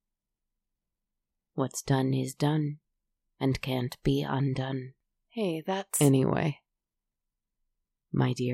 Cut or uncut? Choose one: uncut